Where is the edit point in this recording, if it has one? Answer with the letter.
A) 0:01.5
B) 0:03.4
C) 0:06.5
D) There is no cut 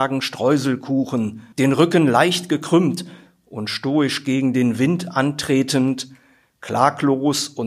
A